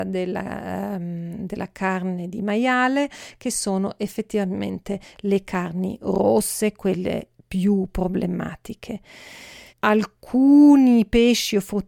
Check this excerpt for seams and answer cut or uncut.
cut